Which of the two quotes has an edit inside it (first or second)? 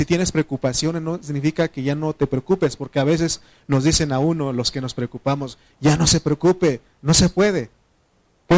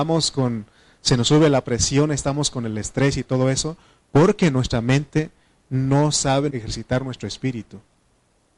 second